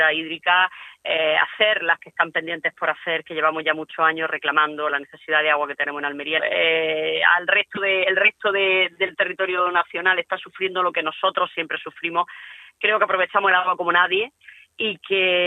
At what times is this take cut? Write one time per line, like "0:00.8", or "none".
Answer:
0:06.4